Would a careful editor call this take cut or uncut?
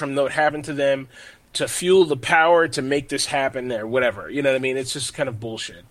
uncut